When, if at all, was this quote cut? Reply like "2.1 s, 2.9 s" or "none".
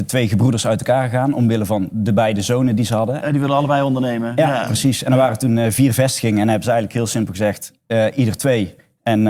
3.2 s